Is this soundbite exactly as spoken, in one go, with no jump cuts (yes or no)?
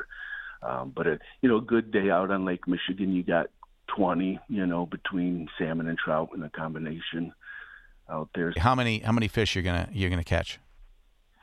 no